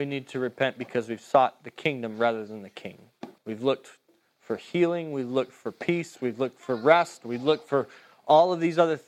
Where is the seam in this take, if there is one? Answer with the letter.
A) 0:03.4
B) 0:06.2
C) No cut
A